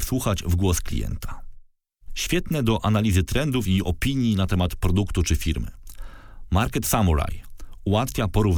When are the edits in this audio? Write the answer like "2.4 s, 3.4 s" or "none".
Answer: 2.1 s